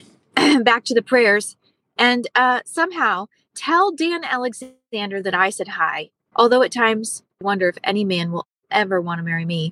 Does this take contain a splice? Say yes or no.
yes